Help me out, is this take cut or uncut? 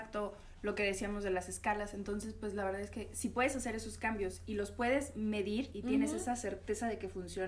uncut